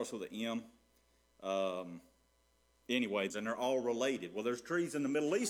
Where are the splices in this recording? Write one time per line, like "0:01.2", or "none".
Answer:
0:03.3